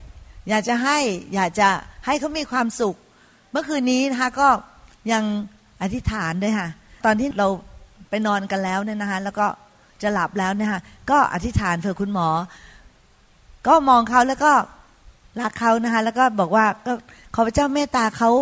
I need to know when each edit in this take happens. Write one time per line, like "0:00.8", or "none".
none